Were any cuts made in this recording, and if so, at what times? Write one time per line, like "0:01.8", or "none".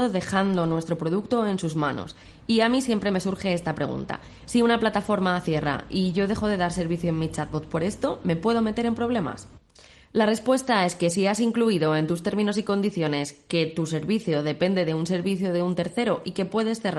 none